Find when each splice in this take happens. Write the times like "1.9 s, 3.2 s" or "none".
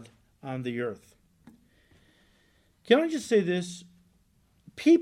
none